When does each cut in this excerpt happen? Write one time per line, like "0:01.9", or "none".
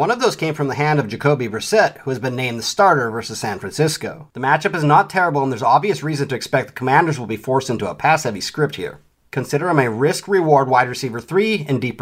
none